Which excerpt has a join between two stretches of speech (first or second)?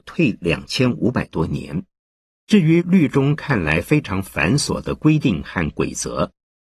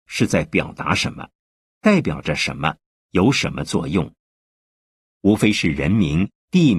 first